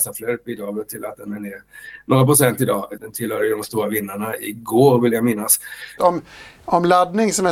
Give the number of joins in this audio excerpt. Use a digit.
2